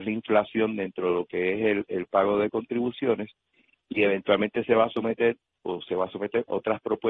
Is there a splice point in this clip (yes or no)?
no